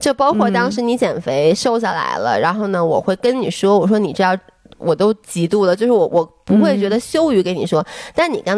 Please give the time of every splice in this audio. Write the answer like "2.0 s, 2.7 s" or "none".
none